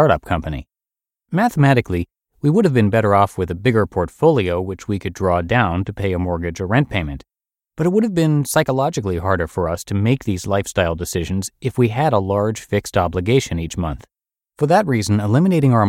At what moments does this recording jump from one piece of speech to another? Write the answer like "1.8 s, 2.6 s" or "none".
1.1 s